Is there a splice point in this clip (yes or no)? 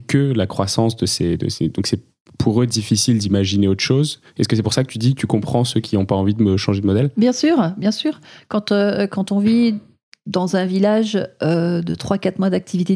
no